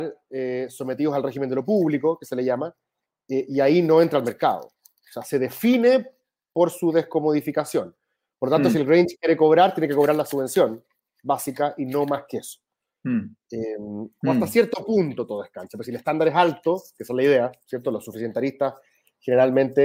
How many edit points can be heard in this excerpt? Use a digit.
2